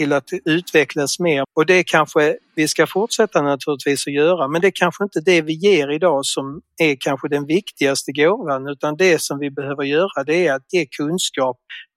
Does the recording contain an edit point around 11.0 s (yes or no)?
no